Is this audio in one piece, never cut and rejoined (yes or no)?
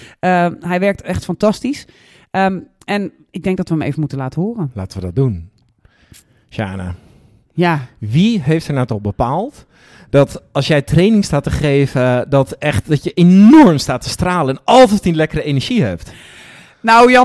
yes